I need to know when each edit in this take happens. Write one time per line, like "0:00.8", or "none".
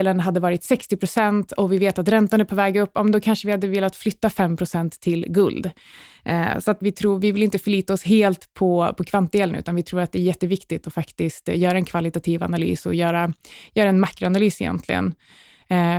0:06.8